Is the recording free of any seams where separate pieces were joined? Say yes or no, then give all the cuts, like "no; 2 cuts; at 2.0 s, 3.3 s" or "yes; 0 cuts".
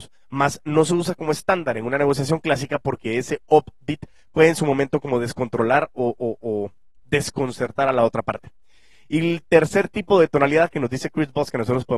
yes; 0 cuts